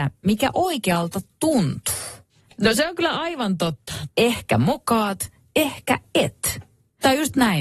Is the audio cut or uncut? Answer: cut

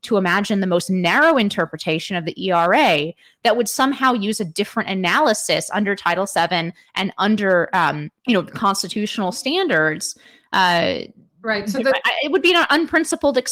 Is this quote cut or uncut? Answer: cut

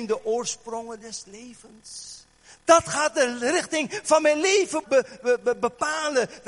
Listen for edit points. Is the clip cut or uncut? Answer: cut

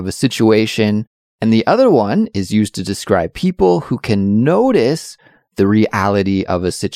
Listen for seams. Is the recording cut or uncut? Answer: uncut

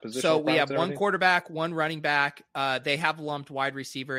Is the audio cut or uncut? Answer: uncut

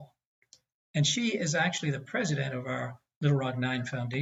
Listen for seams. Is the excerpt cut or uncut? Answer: uncut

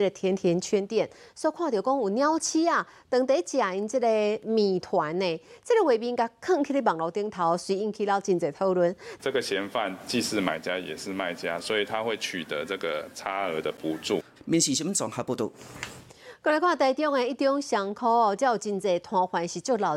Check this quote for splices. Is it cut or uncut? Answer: cut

